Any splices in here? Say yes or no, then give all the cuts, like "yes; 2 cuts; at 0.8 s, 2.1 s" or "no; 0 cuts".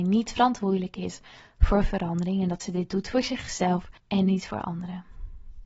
yes; 1 cut; at 4.0 s